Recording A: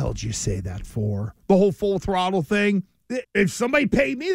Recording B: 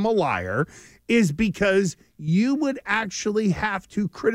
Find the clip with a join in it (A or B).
A